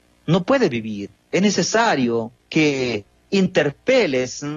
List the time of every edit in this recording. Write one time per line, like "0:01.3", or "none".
0:01.2
0:02.4